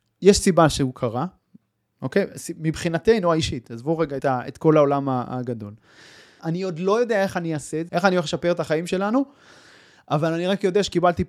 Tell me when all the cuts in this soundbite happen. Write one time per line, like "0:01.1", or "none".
0:04.2
0:06.4
0:07.9